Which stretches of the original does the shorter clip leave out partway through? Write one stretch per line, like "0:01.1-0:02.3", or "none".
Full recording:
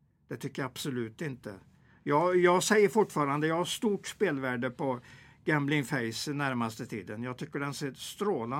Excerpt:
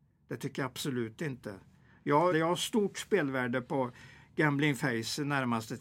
0:02.3-0:03.4